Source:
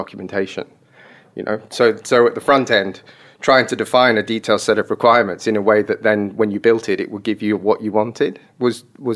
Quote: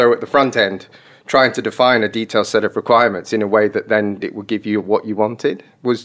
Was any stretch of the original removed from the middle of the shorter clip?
yes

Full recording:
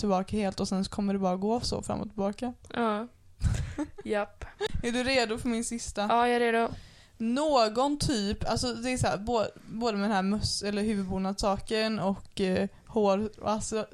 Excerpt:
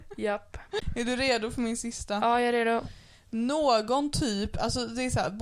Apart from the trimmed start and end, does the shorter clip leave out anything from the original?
no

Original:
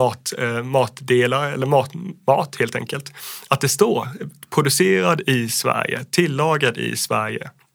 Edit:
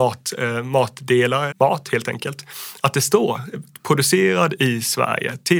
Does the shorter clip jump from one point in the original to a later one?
yes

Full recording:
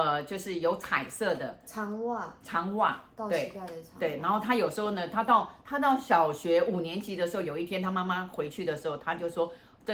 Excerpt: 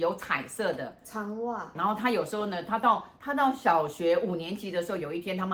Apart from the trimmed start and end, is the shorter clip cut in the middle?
yes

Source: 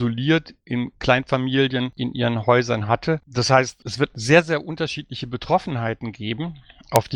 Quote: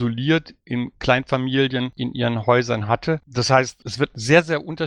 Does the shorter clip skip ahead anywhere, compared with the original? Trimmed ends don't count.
no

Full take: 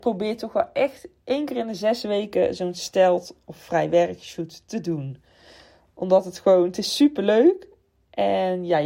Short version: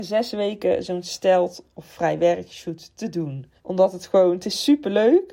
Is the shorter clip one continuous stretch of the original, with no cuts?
no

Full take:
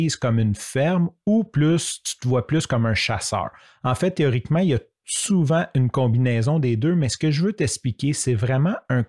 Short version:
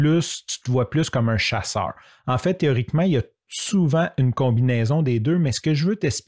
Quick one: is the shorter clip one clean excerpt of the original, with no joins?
yes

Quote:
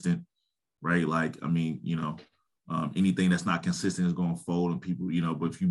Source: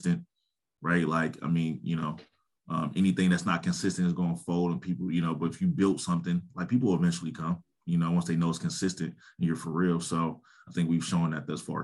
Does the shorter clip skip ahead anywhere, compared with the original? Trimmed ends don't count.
no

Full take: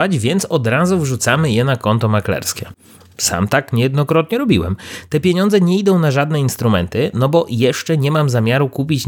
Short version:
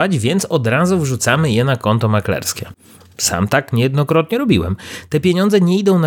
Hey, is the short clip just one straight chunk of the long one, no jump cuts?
yes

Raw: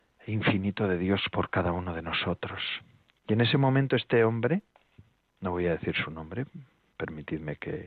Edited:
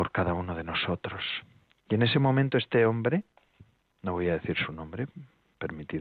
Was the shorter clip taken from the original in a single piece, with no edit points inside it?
yes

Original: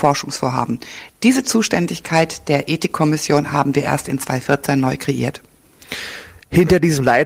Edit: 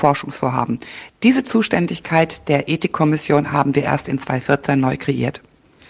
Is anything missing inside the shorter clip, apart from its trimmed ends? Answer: no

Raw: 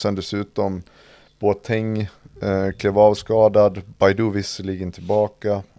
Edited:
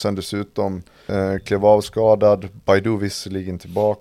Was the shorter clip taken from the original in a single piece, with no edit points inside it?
no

